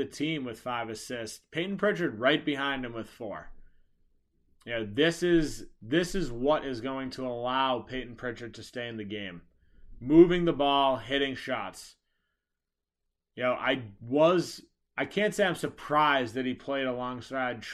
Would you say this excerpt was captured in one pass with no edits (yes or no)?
yes